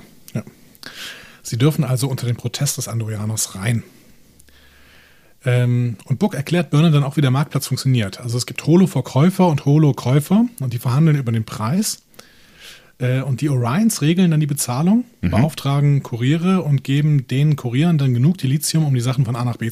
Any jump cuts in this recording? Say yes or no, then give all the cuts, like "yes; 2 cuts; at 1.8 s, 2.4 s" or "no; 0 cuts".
no; 0 cuts